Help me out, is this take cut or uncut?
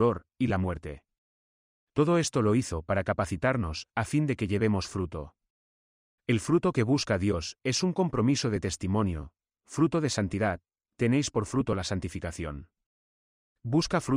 uncut